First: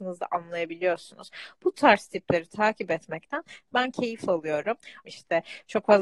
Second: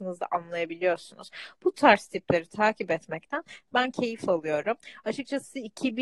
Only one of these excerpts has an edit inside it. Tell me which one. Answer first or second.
first